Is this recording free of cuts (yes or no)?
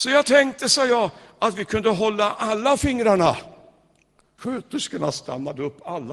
no